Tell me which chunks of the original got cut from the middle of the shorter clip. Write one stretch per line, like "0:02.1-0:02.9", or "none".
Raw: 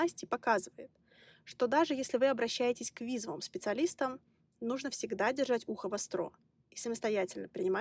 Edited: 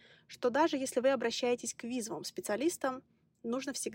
none